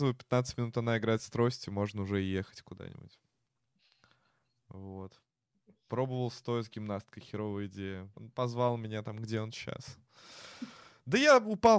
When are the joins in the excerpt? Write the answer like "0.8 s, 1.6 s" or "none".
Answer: 8.1 s